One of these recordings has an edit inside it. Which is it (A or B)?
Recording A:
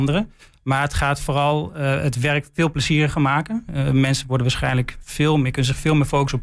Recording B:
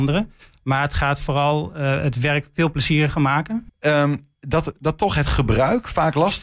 B